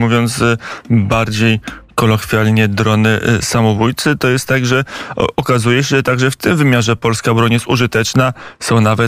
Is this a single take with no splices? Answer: yes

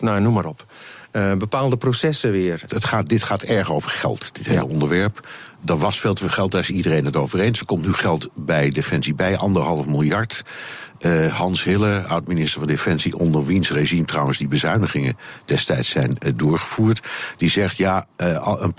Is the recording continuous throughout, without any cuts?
no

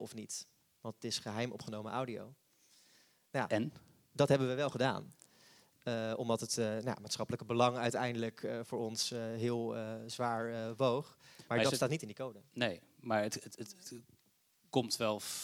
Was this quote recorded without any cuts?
yes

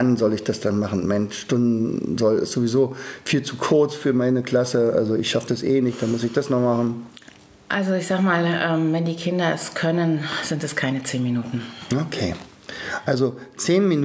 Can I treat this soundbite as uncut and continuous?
yes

